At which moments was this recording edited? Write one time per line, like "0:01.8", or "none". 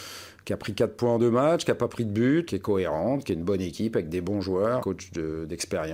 0:02.5
0:04.8